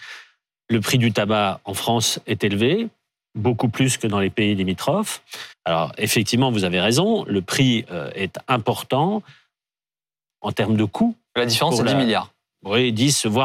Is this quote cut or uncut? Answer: cut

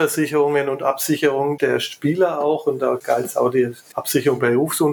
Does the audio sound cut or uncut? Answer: cut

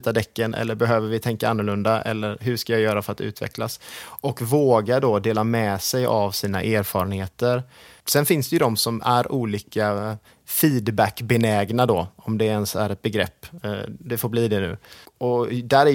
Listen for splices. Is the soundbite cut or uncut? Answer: uncut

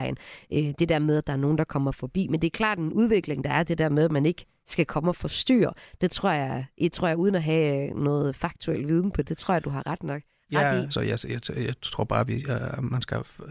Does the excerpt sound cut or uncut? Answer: cut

